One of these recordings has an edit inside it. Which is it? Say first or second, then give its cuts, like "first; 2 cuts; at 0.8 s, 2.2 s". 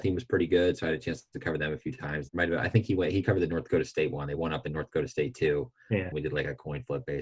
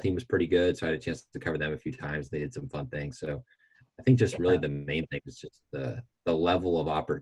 first; 2 cuts; at 2.3 s, 6.1 s